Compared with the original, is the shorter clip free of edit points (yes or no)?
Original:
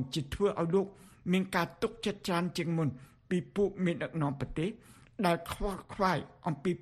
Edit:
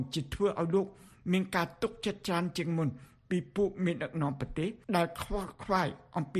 no